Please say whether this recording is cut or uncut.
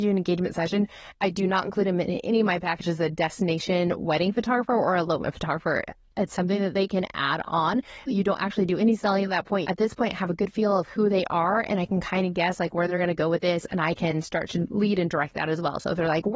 cut